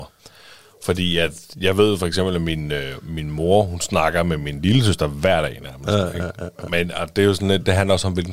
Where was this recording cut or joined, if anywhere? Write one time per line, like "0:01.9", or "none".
none

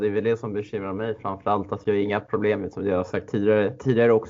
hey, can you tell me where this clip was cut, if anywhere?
none

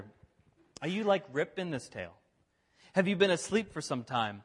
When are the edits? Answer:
none

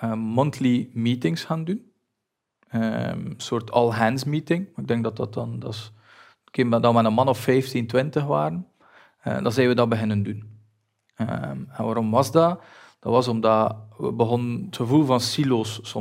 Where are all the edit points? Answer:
none

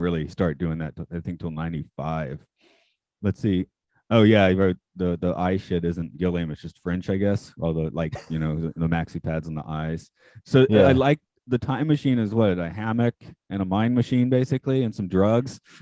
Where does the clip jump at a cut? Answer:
0:02.6

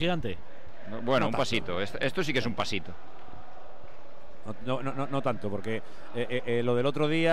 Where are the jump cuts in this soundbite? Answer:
none

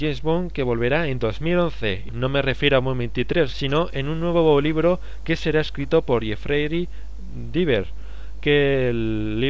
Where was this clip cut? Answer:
0:02.1
0:03.5

